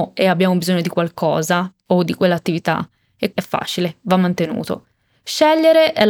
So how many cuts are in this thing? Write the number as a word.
one